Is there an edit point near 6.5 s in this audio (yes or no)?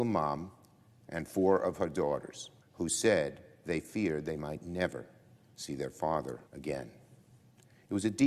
yes